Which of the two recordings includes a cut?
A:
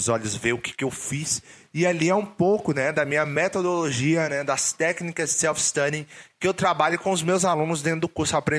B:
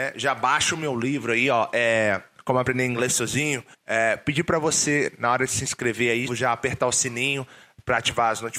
B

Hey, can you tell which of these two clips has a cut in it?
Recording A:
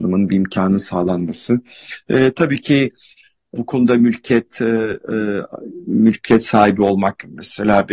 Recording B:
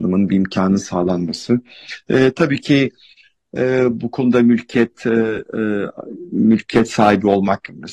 A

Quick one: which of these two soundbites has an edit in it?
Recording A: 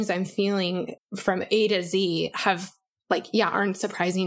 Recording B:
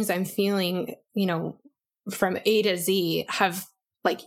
A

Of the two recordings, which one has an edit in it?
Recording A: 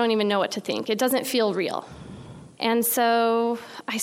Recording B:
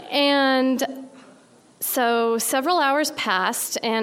A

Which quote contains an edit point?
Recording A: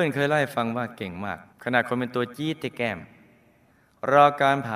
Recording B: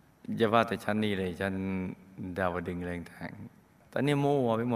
A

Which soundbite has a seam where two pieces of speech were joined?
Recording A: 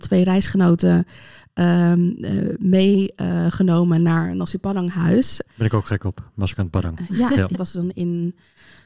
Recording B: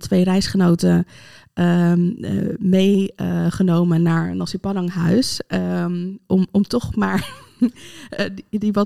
A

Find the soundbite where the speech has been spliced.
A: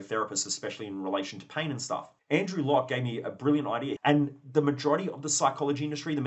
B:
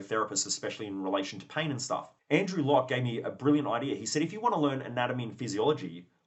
A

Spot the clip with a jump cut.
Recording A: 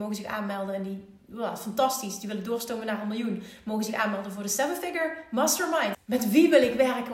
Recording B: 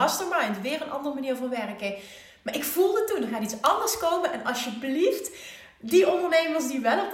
A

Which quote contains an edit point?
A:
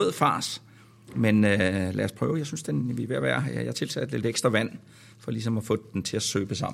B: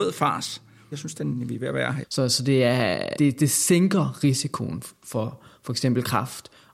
B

